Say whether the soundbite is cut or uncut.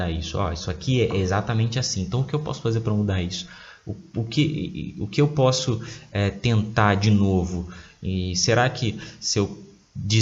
uncut